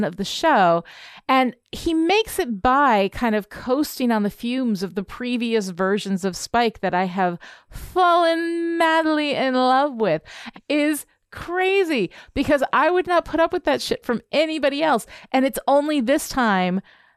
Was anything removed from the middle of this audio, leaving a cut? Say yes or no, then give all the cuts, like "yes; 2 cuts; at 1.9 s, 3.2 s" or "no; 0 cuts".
yes; 1 cut; at 10.5 s